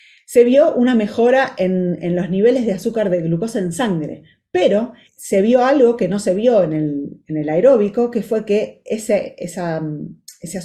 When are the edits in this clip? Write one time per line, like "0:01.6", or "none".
0:05.1